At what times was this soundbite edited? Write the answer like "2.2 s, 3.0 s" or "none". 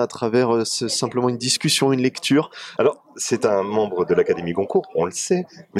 2.8 s